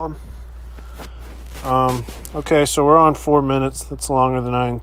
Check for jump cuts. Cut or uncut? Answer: uncut